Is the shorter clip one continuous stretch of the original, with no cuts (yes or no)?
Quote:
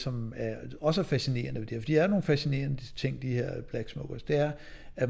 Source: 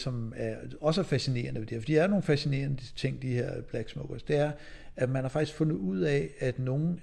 yes